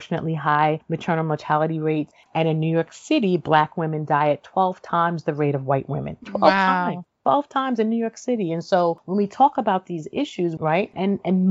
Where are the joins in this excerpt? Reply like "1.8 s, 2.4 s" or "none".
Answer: 2.3 s, 10.6 s